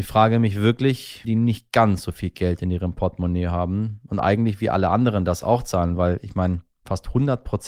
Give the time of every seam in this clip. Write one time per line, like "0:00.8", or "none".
0:01.2